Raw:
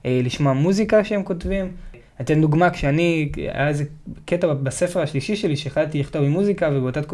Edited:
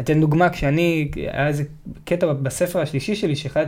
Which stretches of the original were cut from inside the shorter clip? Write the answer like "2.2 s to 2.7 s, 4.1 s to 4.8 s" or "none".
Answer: none